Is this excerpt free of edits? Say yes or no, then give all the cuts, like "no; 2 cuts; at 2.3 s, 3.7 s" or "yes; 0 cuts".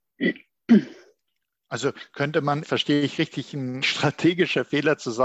no; 2 cuts; at 2.6 s, 3.8 s